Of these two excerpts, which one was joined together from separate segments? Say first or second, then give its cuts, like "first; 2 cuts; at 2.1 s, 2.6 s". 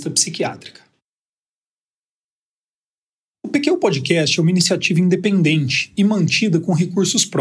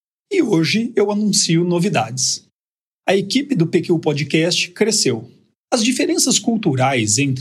second; 1 cut; at 5.7 s